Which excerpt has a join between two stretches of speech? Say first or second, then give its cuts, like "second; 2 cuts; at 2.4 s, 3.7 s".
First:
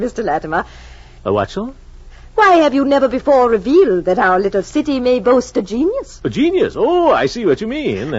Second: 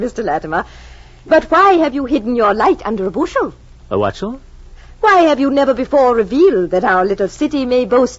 first; 1 cut; at 1.2 s